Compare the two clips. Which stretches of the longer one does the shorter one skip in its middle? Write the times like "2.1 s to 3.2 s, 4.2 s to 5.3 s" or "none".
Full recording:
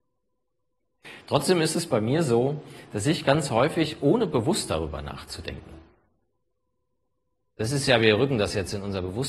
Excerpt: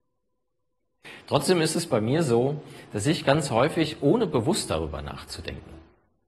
none